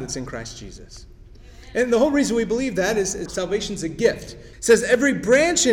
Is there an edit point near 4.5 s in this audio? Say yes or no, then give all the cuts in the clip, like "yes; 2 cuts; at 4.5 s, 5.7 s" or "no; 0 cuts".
yes; 2 cuts; at 3.3 s, 4.5 s